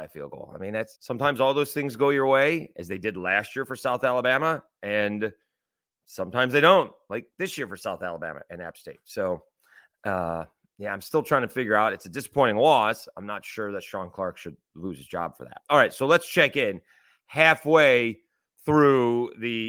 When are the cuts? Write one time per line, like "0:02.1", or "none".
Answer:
0:00.9

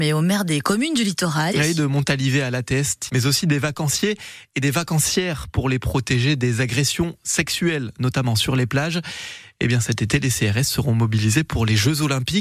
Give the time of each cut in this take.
0:01.5
0:03.1

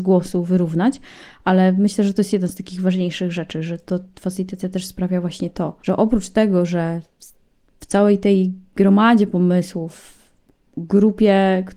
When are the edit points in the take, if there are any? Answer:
0:05.8

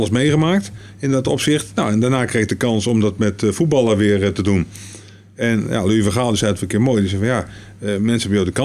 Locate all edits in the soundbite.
none

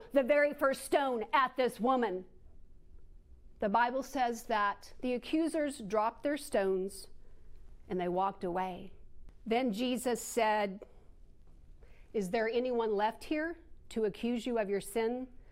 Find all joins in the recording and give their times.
none

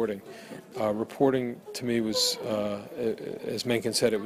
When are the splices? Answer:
none

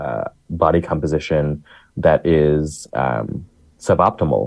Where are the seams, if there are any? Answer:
none

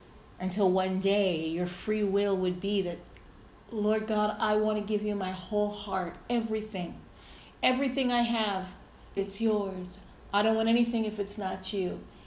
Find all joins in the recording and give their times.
0:09.2

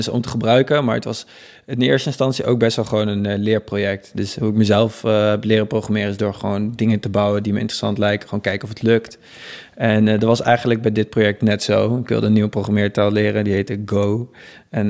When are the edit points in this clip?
none

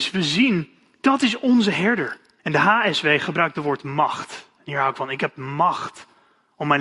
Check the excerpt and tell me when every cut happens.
0:02.4

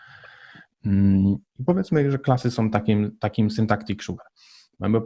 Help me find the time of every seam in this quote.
0:01.5

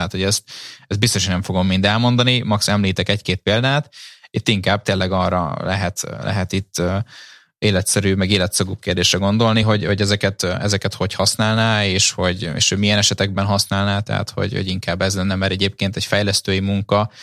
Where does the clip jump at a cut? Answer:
none

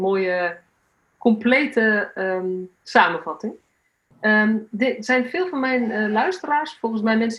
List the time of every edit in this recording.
0:04.7

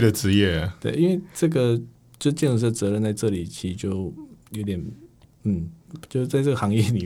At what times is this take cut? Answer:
none

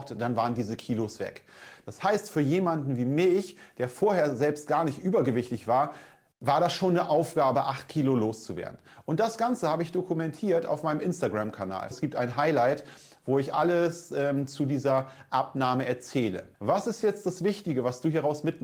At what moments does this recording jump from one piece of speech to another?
0:11.9
0:16.5

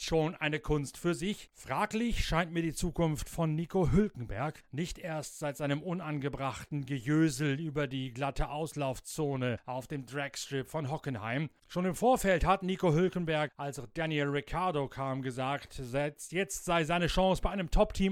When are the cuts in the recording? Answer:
0:01.5

